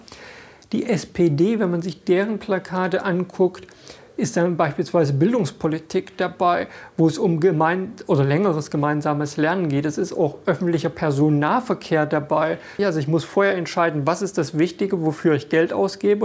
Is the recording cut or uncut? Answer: cut